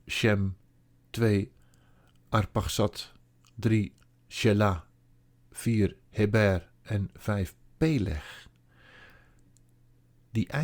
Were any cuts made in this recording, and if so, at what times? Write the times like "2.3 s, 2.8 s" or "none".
none